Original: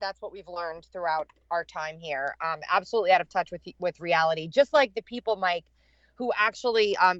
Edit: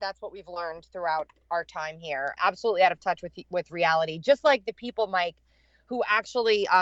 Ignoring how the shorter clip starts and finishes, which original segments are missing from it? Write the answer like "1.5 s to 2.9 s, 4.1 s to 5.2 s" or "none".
2.4 s to 2.7 s

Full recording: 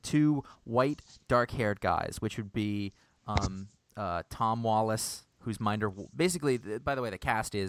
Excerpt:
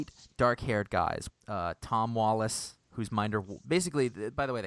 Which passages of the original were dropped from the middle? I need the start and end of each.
2.2 s to 3.8 s

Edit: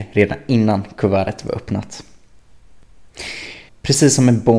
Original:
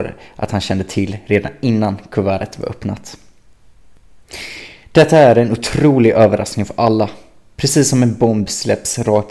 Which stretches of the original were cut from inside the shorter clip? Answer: 4.8 s to 7.4 s

